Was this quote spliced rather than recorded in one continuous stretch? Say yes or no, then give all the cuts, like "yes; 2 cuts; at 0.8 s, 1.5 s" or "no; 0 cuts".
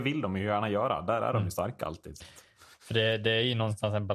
no; 0 cuts